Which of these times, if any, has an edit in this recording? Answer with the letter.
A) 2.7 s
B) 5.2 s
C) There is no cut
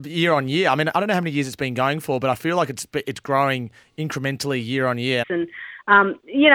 B